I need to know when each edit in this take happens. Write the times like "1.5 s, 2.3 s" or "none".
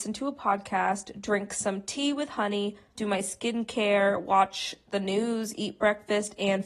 2.9 s